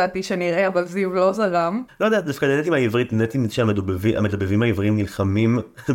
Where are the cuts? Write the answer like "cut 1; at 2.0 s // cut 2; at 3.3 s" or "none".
cut 1; at 1.9 s